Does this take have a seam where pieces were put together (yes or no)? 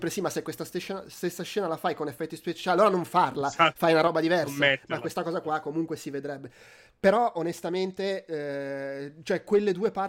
no